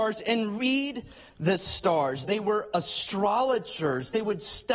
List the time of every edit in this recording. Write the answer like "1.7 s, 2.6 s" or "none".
2.2 s